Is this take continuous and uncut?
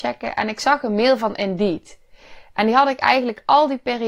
yes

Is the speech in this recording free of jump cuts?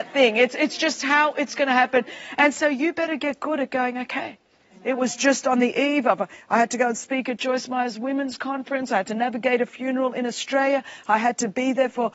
no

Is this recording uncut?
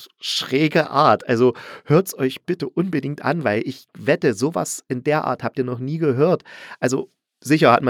yes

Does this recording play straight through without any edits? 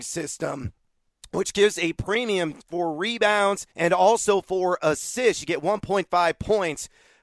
no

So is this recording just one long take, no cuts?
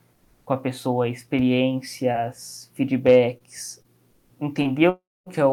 no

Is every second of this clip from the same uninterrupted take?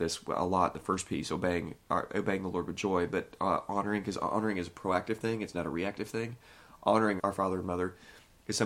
no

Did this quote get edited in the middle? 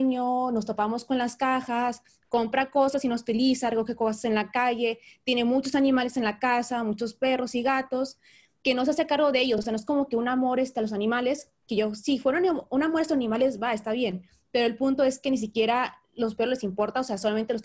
no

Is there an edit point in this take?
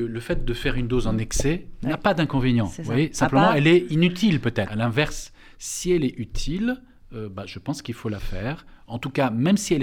yes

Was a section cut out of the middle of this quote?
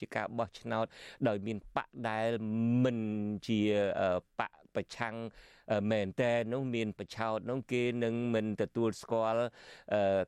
yes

